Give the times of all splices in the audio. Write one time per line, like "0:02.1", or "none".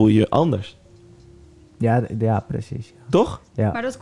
none